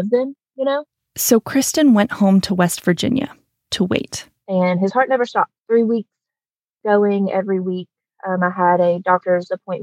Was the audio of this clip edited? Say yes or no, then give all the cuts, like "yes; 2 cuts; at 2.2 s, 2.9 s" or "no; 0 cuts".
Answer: yes; 1 cut; at 5.6 s